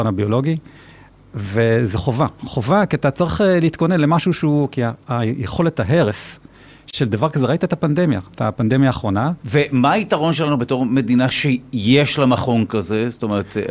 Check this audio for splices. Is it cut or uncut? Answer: cut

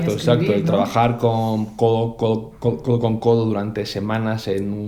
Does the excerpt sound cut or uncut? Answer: uncut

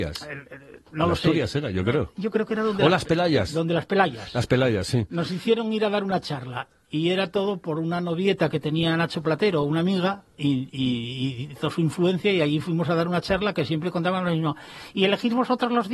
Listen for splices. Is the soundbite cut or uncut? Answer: uncut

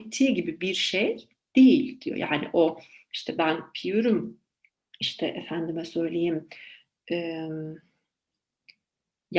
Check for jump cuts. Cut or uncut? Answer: uncut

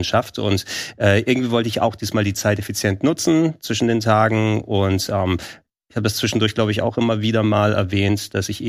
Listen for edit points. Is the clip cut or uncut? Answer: uncut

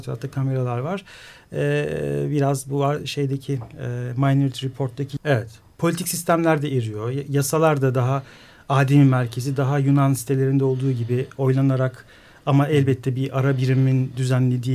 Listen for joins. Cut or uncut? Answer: cut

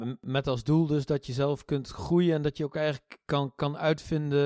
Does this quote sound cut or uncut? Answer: uncut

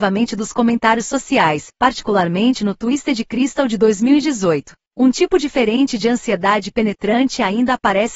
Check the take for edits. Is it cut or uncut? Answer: cut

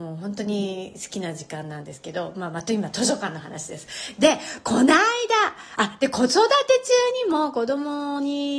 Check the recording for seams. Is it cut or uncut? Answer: uncut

